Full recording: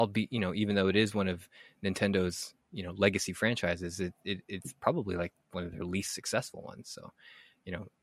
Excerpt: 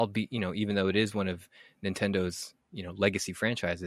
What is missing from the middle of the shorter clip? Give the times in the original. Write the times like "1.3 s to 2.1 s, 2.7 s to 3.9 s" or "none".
none

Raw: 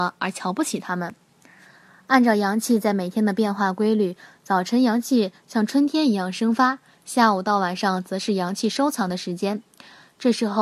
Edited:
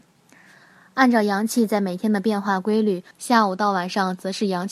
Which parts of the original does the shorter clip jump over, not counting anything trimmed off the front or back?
4.2 s to 7.0 s

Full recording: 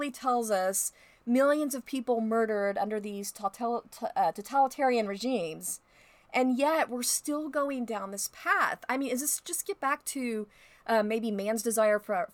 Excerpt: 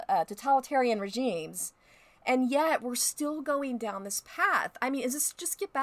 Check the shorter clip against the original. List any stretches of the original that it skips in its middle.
none

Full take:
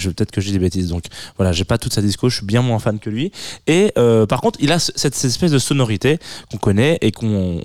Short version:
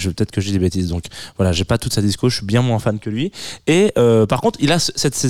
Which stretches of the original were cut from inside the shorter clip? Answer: none

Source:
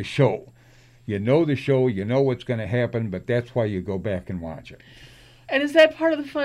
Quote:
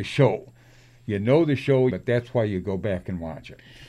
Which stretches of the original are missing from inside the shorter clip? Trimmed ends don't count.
1.9 s to 3.1 s

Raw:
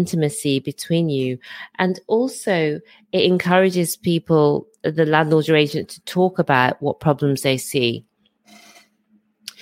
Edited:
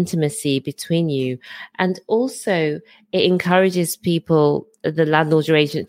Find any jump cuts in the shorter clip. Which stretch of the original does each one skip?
none

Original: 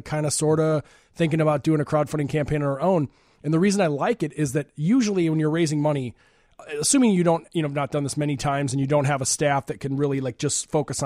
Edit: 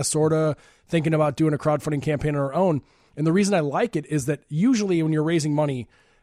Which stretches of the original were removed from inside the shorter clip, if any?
none

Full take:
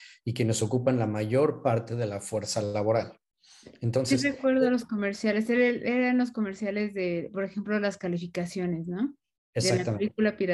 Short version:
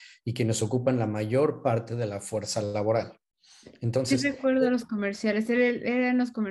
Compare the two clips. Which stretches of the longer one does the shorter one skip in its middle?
none

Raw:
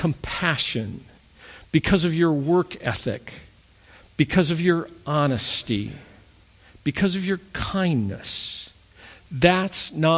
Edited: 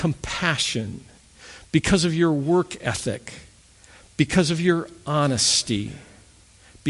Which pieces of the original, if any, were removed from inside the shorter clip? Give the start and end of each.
none

